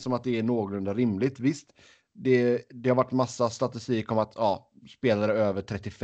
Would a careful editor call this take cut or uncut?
uncut